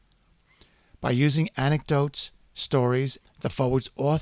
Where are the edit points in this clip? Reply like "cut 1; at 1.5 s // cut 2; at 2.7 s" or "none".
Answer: cut 1; at 3.2 s